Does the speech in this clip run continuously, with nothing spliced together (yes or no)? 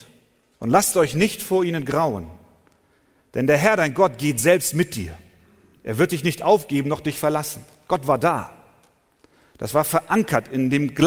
yes